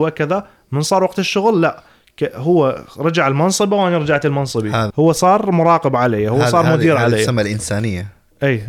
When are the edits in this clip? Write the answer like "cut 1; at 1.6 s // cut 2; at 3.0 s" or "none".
cut 1; at 4.9 s